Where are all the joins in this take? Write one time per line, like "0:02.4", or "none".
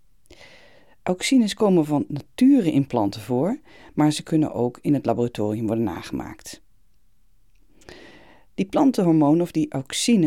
0:08.6